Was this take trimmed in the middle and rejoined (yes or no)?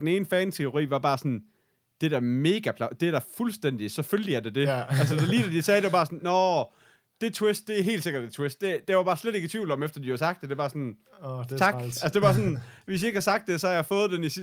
no